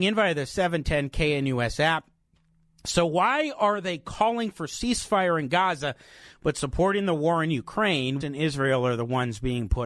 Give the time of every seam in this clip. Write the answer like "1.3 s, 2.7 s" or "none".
8.2 s